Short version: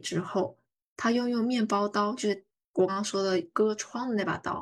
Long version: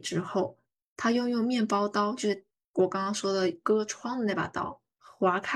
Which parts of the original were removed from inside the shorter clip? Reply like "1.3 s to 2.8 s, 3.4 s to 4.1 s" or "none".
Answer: 2.9 s to 3.0 s